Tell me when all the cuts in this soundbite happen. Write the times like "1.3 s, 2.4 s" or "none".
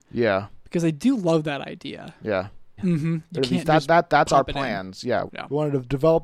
2.8 s, 5.3 s